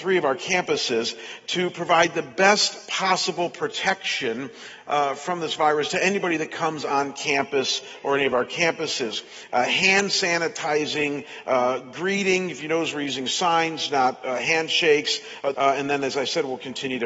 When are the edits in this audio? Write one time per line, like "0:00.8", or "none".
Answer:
0:09.5
0:15.5